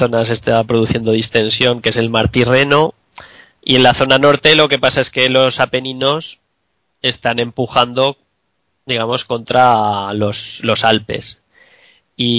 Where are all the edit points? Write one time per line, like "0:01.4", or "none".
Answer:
none